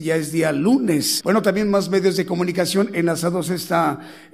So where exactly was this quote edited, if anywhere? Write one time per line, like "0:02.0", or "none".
0:01.2